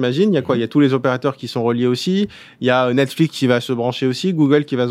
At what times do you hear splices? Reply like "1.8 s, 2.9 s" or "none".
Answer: none